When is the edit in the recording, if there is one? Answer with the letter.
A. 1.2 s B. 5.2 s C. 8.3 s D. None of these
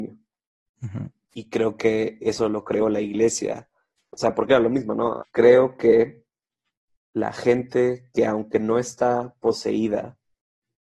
B